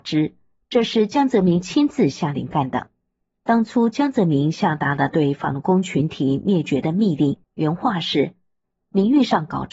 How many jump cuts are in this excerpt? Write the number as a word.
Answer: one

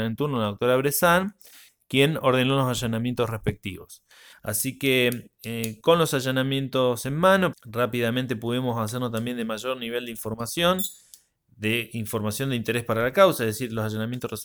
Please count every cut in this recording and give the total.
two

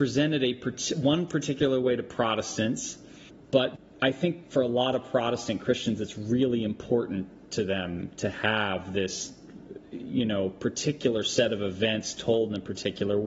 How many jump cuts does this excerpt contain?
one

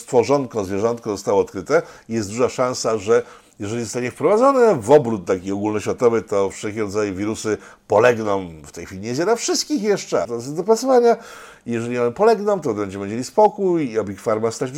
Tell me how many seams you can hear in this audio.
one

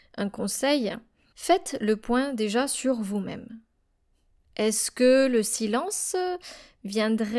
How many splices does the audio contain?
one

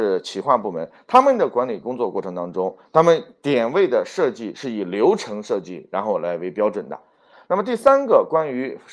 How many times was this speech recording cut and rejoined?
one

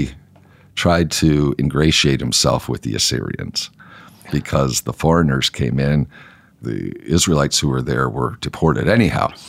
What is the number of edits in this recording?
one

